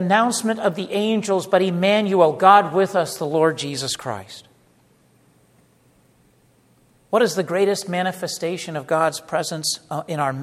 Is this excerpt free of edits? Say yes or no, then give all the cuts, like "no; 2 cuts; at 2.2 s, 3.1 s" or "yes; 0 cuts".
yes; 0 cuts